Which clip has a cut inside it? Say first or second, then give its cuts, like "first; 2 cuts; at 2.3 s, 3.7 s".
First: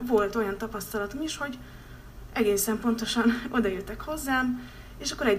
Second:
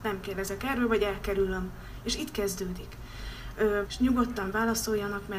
second; 1 cut; at 3.9 s